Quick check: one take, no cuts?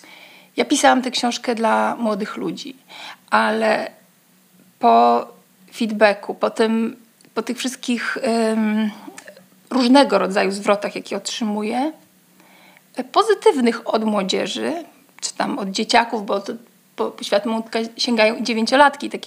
yes; 0 cuts

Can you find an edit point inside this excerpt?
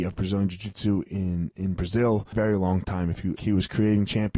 yes; 2 cuts; at 2.3 s, 3.4 s

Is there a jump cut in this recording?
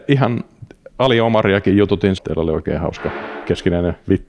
yes; 1 cut; at 2.2 s

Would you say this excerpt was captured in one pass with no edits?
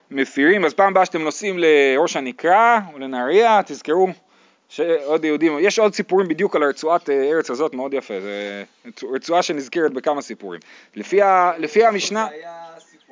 yes; 0 cuts

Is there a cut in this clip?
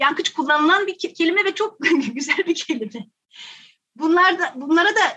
no; 0 cuts

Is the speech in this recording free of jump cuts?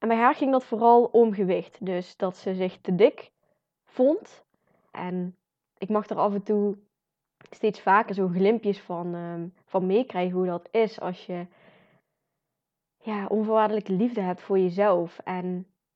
no; 1 cut; at 4.9 s

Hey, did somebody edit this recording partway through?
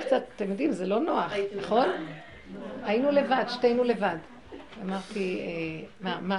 no; 0 cuts

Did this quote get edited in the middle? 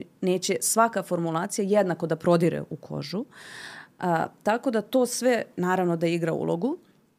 no; 0 cuts

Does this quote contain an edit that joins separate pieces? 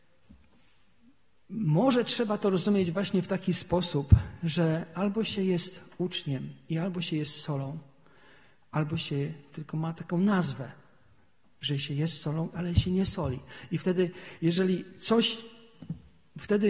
no; 0 cuts

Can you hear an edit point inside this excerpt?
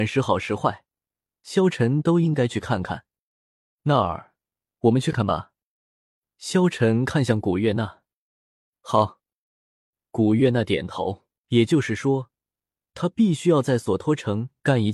yes; 2 cuts; at 5.1 s, 11.4 s

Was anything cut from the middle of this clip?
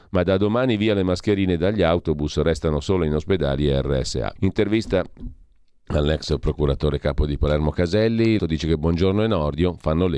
yes; 2 cuts; at 4.4 s, 8.4 s

